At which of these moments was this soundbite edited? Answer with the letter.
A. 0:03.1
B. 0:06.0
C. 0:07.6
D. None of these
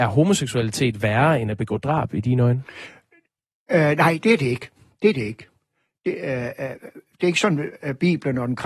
D